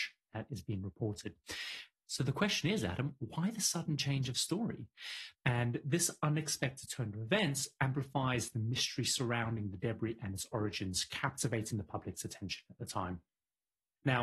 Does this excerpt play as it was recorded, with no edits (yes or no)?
no